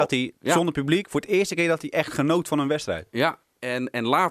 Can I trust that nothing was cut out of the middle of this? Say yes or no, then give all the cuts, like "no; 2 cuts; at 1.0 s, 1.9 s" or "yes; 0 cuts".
yes; 0 cuts